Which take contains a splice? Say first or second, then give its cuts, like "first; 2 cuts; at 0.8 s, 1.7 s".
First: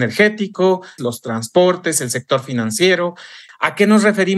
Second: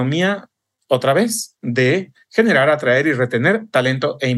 first; 2 cuts; at 1.0 s, 3.5 s